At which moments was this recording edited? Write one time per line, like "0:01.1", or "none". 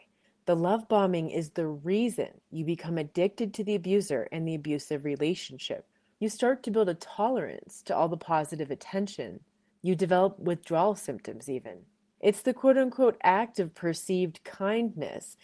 0:06.1
0:09.7
0:12.2